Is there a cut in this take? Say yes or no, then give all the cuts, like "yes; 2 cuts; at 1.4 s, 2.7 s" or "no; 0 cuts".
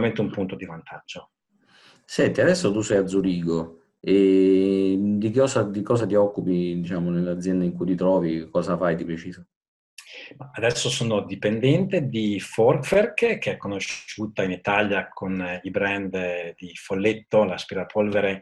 no; 0 cuts